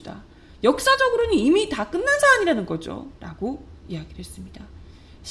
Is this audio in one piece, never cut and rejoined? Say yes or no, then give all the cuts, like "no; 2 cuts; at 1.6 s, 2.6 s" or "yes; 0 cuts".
no; 1 cut; at 3.2 s